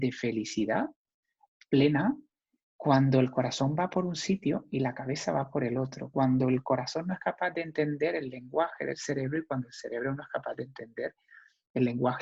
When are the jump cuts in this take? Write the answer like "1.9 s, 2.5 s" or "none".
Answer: none